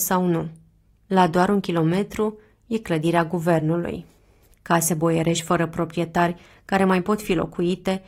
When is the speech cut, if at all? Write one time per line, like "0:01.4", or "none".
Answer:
0:04.5